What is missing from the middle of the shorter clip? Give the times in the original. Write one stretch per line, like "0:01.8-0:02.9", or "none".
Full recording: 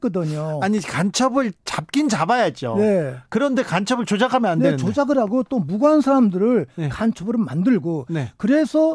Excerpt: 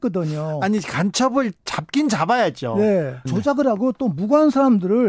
0:03.3-0:04.8